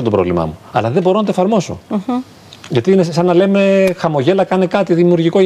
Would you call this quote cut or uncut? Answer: uncut